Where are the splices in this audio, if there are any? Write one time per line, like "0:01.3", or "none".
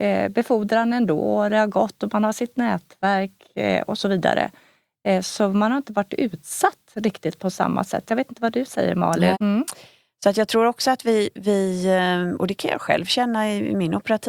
0:09.3